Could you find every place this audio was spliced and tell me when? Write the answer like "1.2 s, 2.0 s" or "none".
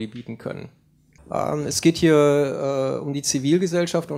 1.2 s